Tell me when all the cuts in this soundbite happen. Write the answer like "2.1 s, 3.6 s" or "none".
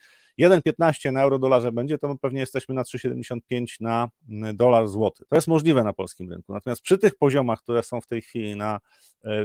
5.2 s